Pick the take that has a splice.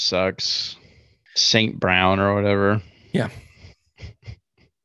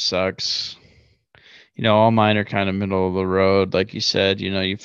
first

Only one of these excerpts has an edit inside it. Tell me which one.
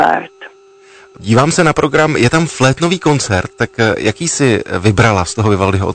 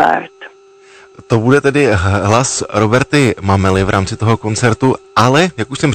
first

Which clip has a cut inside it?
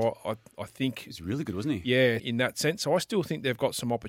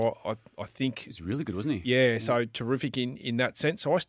first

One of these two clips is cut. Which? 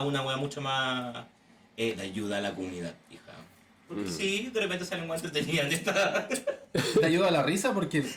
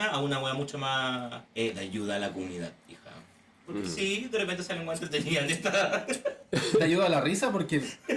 second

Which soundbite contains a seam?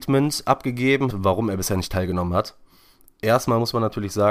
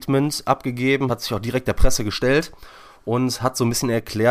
first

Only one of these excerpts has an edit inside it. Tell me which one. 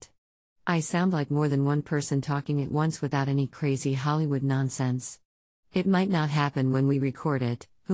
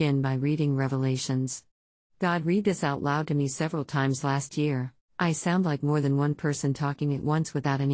second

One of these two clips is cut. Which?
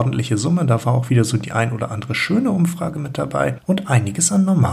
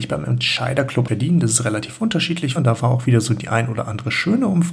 second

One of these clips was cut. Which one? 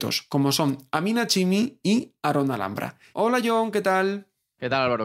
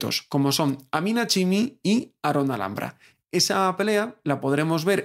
first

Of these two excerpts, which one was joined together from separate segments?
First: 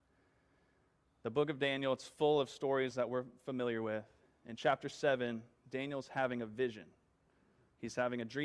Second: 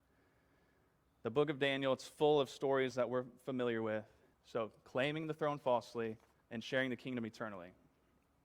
second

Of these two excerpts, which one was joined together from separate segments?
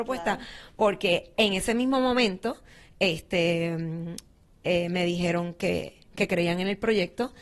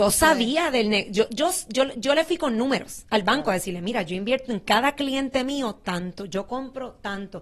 first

